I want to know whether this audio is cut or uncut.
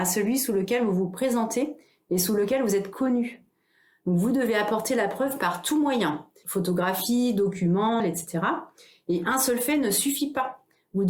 cut